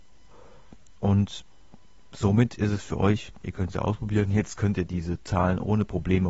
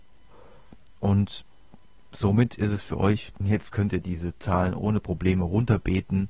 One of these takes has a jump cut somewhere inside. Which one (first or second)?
second